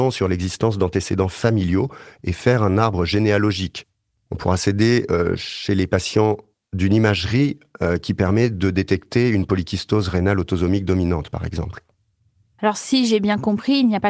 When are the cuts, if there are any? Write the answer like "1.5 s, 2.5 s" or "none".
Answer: none